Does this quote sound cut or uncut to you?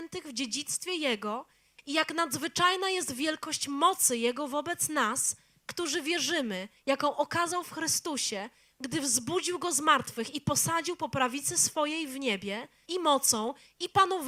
cut